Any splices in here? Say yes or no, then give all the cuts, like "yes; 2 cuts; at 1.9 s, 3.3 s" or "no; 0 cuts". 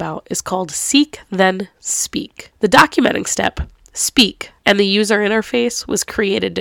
yes; 2 cuts; at 2.5 s, 4.6 s